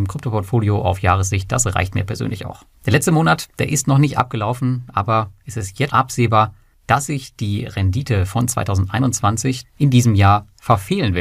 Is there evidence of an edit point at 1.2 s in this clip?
no; 3 cuts; at 2.7 s, 5.9 s, 9.6 s

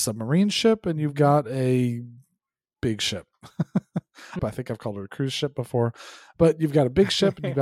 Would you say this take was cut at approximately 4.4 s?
yes; 1 cut; at 4.4 s

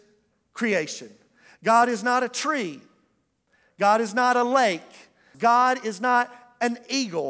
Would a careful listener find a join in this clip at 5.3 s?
yes; 1 cut; at 5.3 s

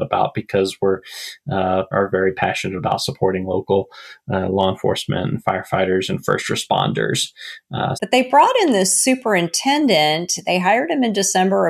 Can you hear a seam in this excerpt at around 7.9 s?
yes; 2 cuts; at 1.9 s, 7.9 s

